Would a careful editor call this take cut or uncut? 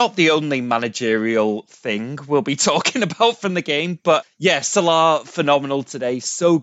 cut